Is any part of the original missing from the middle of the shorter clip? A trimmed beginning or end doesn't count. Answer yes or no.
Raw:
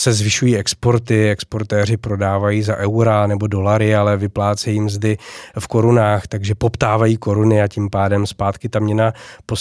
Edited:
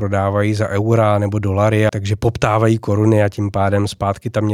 yes